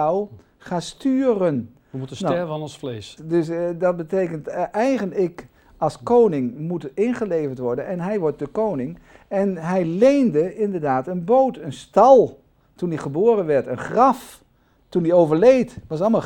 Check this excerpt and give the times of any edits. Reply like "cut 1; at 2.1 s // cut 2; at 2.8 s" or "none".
cut 1; at 3.2 s